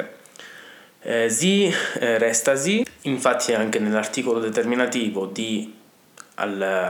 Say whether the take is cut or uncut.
uncut